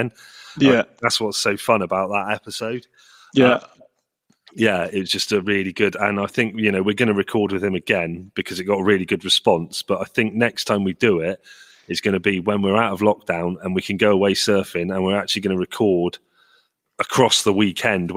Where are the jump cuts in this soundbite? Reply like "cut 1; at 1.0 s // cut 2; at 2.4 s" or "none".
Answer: none